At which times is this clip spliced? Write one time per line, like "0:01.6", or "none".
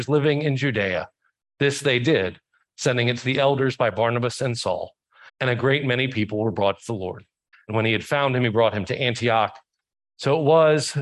0:05.3
0:07.5